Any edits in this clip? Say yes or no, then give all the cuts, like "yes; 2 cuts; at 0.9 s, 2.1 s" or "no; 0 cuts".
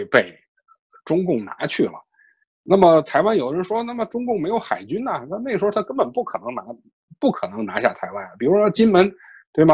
no; 0 cuts